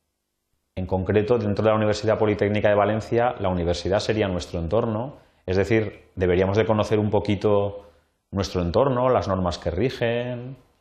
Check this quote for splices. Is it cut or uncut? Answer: uncut